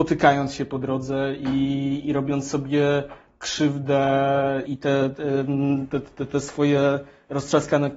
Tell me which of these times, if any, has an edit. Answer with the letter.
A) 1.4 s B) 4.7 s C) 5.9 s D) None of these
B